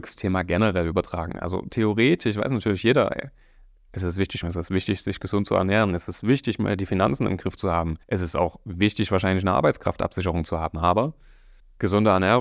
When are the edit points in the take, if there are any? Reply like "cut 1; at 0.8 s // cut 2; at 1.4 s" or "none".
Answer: cut 1; at 4.4 s // cut 2; at 8.0 s